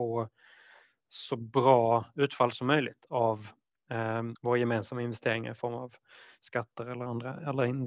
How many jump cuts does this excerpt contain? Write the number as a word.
one